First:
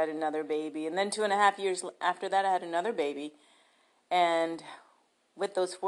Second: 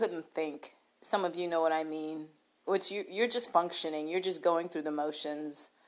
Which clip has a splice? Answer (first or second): second